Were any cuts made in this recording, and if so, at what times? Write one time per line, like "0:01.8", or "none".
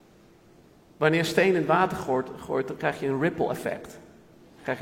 none